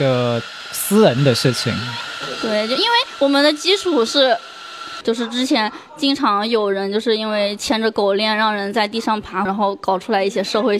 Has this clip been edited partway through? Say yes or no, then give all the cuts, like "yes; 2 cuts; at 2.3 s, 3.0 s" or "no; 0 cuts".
yes; 2 cuts; at 5.0 s, 9.5 s